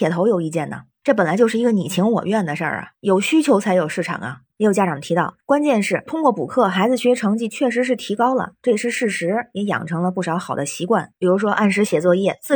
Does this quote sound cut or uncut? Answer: uncut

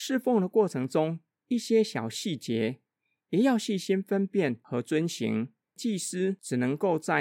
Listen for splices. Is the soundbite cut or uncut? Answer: cut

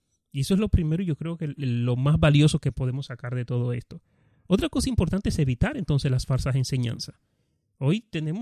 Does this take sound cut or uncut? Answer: cut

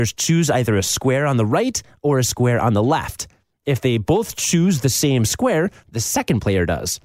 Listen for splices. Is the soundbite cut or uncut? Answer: cut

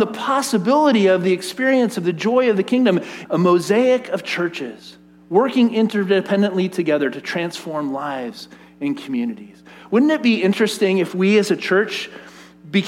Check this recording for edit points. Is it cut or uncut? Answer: cut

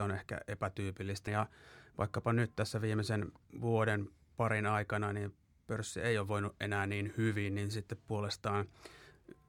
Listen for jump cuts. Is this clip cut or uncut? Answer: cut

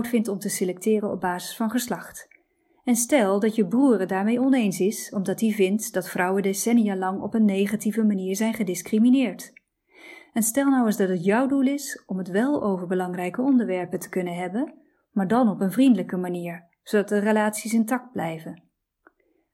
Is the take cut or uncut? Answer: uncut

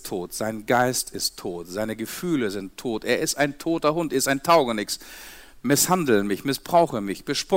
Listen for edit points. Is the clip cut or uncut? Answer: uncut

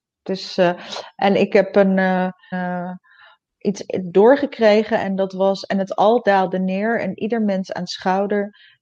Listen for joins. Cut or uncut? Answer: cut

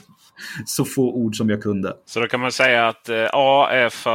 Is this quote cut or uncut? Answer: uncut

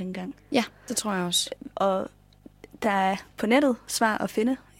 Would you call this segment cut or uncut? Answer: uncut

